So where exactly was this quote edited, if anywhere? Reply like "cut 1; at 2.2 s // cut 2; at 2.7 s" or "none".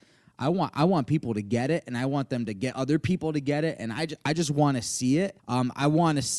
cut 1; at 5.4 s